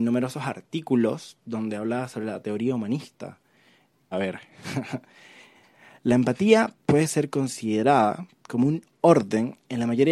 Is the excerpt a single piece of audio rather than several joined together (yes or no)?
no